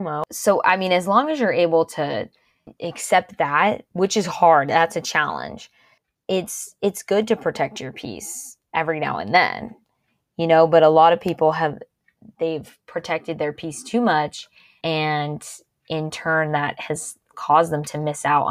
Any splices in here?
no; 0 cuts

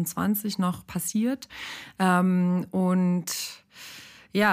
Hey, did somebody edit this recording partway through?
no; 0 cuts

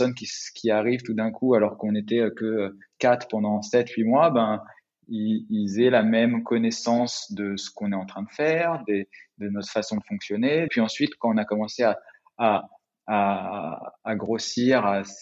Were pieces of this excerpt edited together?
yes; 1 cut; at 10.7 s

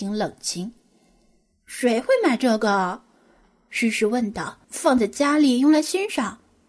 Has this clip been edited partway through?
yes; 1 cut; at 4.6 s

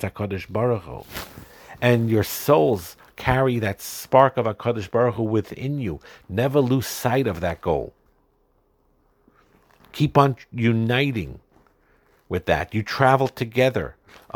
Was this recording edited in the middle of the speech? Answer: no; 0 cuts

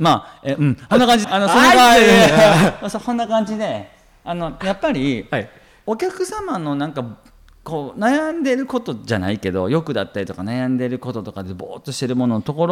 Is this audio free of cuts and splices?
no; 1 cut; at 1.2 s

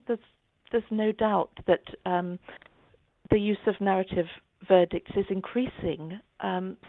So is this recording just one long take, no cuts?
yes; 0 cuts

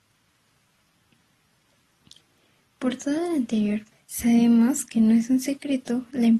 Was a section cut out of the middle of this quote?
yes; 1 cut; at 3.9 s

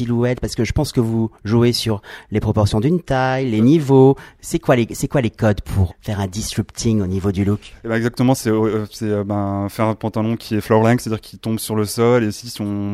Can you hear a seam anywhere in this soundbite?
yes; 1 cut; at 5.9 s

